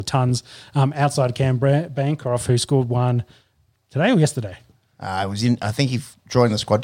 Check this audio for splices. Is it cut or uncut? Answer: uncut